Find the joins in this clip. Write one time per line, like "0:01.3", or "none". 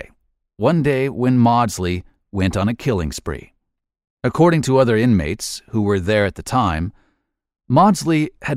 none